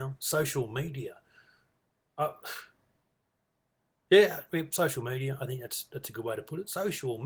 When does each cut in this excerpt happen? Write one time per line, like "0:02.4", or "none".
none